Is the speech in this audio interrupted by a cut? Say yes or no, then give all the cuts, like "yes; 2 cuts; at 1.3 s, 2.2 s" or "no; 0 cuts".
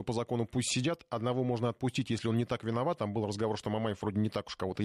no; 0 cuts